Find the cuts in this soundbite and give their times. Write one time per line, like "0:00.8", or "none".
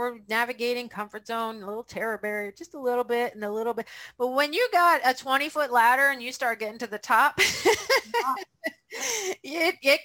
none